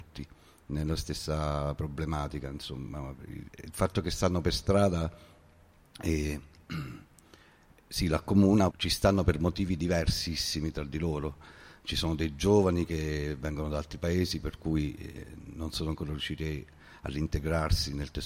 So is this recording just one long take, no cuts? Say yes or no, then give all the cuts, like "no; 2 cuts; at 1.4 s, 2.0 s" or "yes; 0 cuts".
no; 1 cut; at 8.7 s